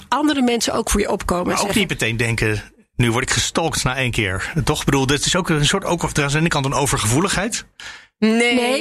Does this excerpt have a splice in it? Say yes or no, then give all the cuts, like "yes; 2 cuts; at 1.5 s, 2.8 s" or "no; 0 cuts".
no; 0 cuts